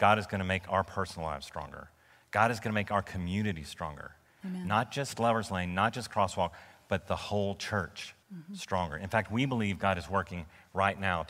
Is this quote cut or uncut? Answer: cut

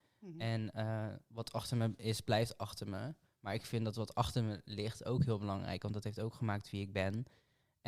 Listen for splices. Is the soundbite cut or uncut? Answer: uncut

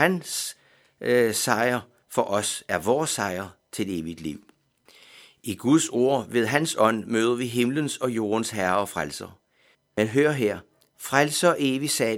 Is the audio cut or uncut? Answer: cut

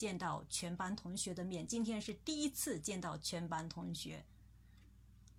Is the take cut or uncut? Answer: uncut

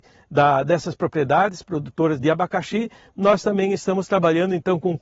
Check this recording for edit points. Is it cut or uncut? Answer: cut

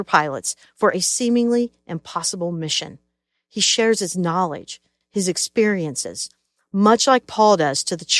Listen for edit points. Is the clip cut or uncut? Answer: cut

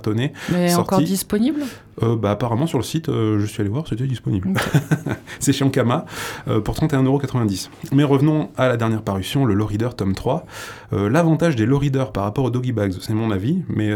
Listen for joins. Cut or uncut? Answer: uncut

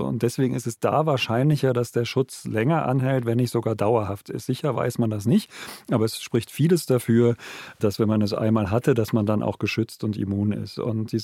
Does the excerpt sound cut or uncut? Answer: uncut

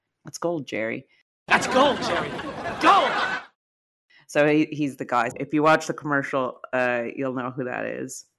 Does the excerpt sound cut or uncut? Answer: cut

